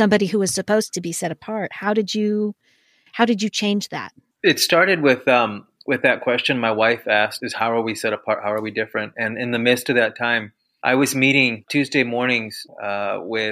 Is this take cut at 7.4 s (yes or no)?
yes